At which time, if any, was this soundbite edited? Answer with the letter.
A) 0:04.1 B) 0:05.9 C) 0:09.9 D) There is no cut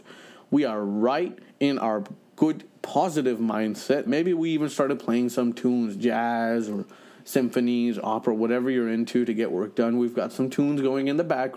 A